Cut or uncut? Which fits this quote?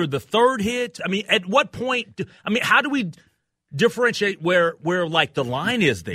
cut